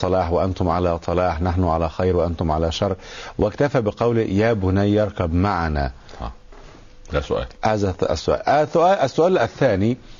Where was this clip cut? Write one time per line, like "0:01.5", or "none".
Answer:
none